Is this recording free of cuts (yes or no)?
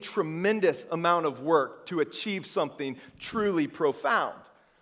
yes